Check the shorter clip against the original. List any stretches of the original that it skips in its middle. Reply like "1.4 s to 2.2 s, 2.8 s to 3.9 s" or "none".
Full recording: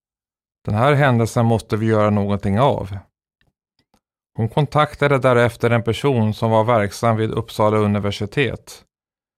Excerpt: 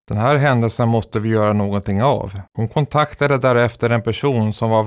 3.0 s to 4.3 s